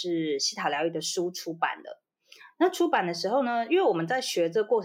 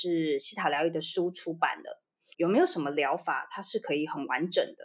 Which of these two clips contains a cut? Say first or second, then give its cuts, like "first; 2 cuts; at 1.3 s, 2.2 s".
second; 1 cut; at 2.3 s